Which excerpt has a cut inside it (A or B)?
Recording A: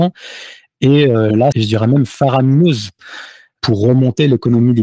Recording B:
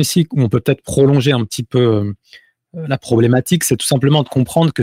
A